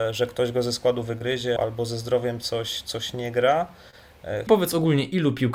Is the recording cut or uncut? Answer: cut